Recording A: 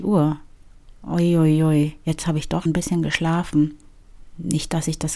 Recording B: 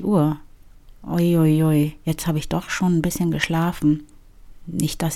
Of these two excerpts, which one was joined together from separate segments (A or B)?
A